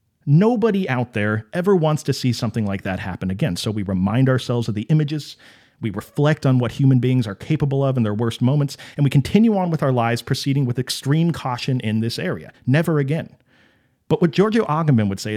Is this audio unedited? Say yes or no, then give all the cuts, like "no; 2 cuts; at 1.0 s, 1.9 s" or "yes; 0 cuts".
yes; 0 cuts